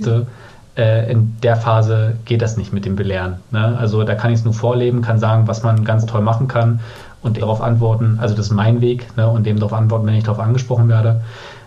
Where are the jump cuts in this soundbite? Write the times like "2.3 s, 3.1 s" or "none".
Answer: 7.4 s